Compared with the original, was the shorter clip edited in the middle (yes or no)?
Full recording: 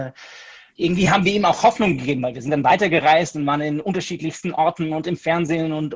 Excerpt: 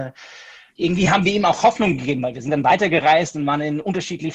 no